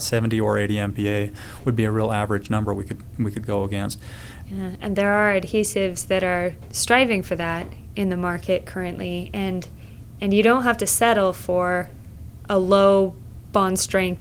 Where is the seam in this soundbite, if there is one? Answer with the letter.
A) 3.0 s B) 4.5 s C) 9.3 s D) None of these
B